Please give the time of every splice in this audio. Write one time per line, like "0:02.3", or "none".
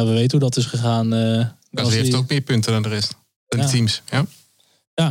none